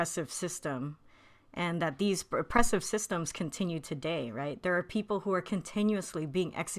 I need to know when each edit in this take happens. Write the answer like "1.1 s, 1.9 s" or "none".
none